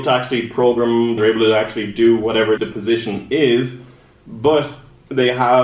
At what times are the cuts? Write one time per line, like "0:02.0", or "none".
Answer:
0:01.2
0:02.6